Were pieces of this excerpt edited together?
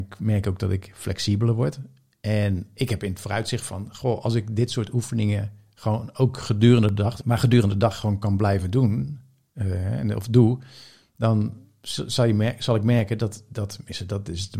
yes; 1 cut; at 7.2 s

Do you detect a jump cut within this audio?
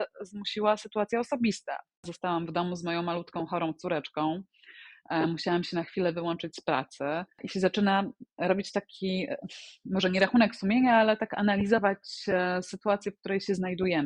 no; 0 cuts

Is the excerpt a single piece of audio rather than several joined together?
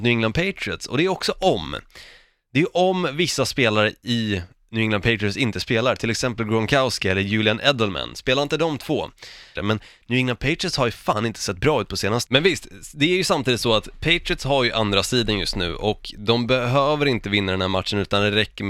no; 2 cuts; at 9.6 s, 12.3 s

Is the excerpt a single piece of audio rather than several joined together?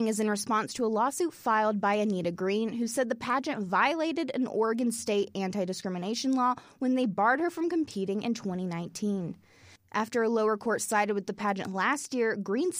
no; 1 cut; at 9.8 s

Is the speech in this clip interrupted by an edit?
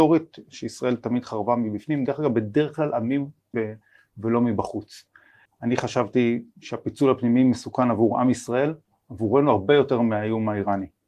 yes; 2 cuts; at 3.5 s, 5.5 s

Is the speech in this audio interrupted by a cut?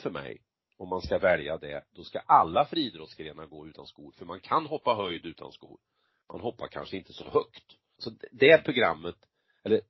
yes; 1 cut; at 8.0 s

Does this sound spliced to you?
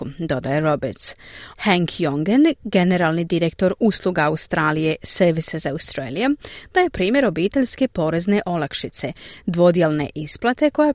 yes; 1 cut; at 1.5 s

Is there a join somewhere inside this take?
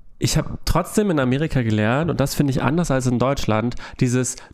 no; 0 cuts

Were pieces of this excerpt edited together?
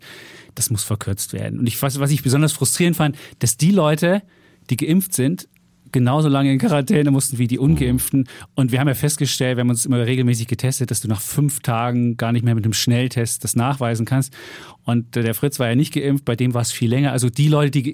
no; 0 cuts

